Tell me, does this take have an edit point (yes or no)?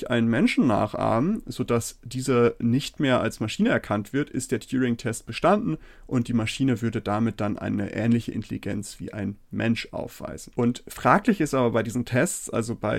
no